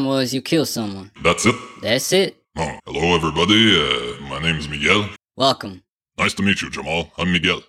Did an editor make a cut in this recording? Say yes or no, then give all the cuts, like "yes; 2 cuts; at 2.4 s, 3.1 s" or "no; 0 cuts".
yes; 3 cuts; at 1.2 s, 2.8 s, 5.2 s